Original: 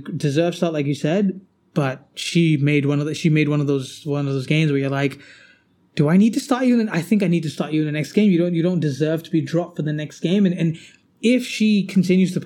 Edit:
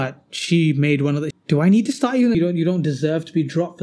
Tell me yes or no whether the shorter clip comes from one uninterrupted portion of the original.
no